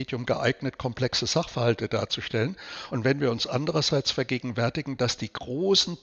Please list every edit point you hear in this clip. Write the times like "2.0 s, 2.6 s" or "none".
none